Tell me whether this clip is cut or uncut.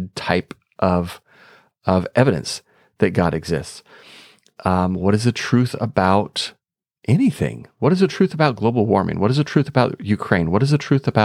uncut